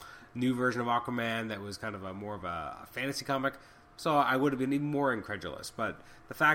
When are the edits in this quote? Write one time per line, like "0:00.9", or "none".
none